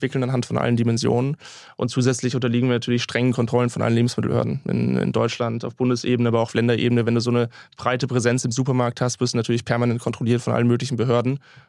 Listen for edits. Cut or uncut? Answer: uncut